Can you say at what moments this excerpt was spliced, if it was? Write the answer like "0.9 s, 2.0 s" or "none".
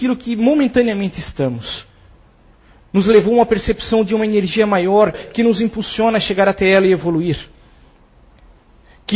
5.1 s